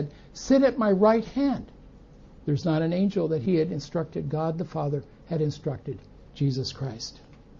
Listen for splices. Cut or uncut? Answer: cut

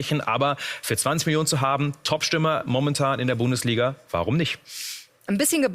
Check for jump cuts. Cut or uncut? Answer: uncut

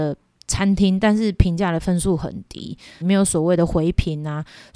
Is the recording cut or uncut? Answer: cut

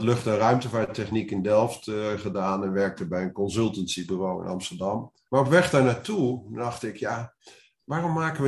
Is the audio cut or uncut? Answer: cut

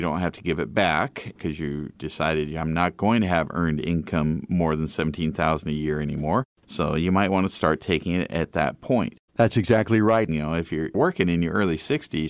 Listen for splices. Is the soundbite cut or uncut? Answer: cut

